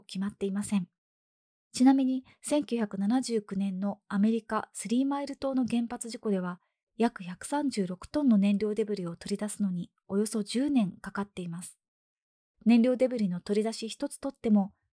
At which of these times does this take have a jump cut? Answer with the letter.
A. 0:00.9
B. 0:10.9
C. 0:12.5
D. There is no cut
D